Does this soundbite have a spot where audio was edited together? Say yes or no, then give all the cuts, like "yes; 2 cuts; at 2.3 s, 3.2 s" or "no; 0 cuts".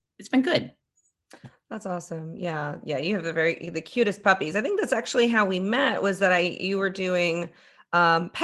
no; 0 cuts